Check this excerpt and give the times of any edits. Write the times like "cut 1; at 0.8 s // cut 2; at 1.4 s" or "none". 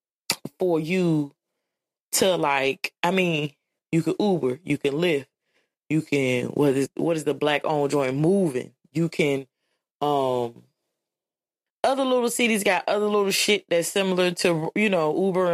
none